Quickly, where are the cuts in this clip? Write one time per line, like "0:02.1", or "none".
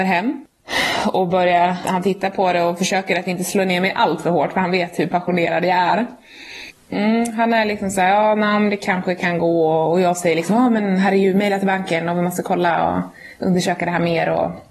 0:01.8